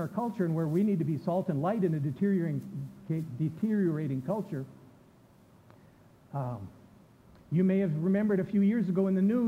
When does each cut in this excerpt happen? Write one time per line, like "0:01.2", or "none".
none